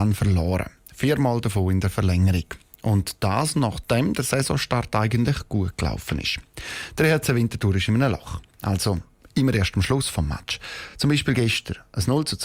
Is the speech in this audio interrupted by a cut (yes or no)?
no